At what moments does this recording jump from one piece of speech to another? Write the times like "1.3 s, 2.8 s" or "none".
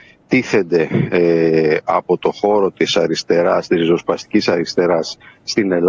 none